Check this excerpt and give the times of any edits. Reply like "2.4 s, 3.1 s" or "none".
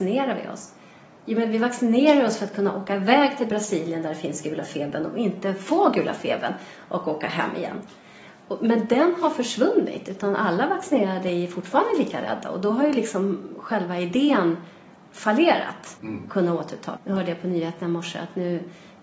16.0 s, 17.0 s